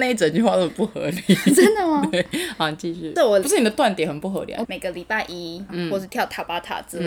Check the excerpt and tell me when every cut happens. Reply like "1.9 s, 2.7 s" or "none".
4.6 s, 5.7 s